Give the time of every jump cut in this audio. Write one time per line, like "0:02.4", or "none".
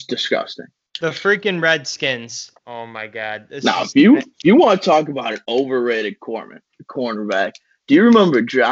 0:02.5